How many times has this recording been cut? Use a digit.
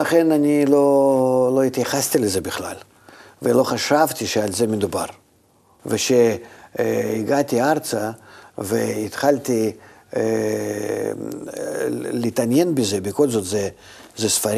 1